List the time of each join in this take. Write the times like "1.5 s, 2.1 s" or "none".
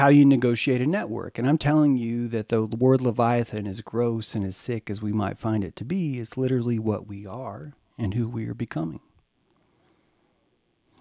none